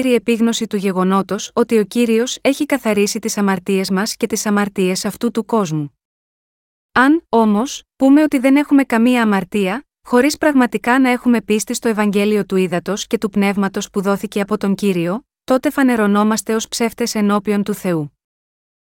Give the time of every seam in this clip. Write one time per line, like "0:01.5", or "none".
none